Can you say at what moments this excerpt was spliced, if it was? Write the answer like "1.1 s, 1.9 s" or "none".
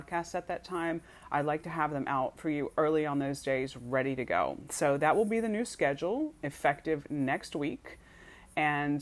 none